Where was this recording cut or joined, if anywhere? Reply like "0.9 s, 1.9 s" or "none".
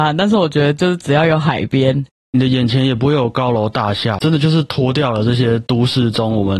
2.2 s, 4.2 s